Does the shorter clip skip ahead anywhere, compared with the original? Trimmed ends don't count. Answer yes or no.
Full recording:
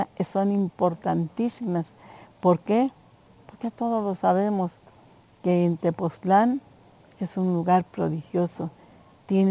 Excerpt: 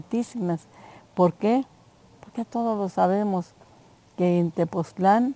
no